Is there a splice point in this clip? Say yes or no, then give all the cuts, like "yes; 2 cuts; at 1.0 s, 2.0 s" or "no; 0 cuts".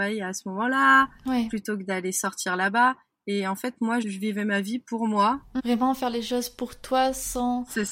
yes; 2 cuts; at 4.0 s, 5.6 s